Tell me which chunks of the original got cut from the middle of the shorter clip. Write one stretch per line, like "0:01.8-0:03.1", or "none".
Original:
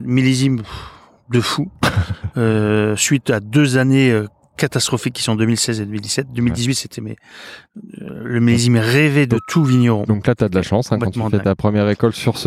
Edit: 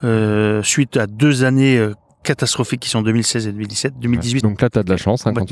0:06.7-0:10.1